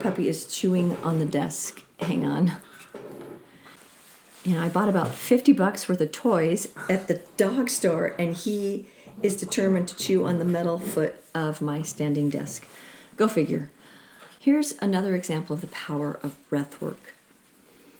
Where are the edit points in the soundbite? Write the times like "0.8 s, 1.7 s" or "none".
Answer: 14.4 s